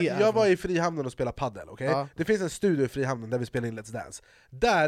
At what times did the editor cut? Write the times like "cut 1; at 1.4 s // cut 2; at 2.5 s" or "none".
none